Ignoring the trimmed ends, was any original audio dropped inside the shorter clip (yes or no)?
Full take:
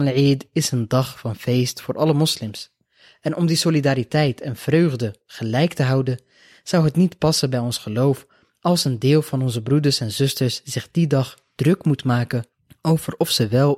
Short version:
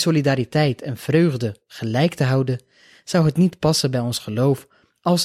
no